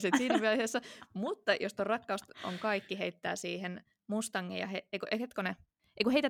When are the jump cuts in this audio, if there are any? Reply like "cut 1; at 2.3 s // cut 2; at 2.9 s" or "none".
none